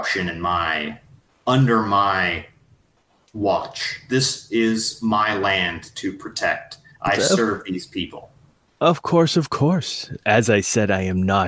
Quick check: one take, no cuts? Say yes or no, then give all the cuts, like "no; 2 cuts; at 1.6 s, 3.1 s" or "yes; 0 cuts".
yes; 0 cuts